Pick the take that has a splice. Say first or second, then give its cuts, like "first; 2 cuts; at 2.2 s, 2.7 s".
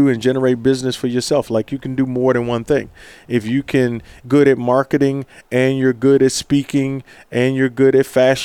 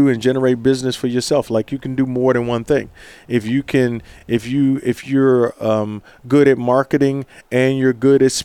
first; 1 cut; at 4.2 s